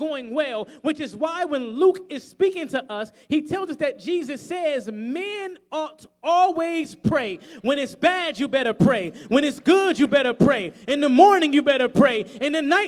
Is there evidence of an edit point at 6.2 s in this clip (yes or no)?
no